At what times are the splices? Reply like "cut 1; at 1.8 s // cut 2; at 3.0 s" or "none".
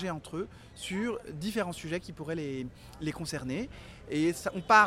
cut 1; at 3.0 s